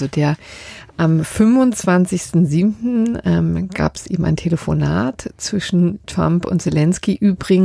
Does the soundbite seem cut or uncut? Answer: uncut